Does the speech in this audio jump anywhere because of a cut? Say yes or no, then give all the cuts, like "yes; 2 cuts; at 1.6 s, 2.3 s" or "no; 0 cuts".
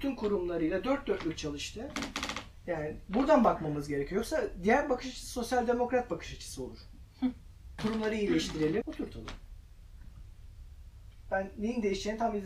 yes; 2 cuts; at 7.8 s, 8.8 s